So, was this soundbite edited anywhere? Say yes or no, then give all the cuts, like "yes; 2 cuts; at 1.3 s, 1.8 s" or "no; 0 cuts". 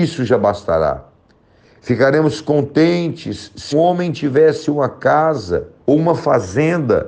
yes; 2 cuts; at 3.7 s, 5.8 s